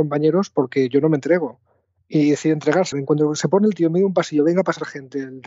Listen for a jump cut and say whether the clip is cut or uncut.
cut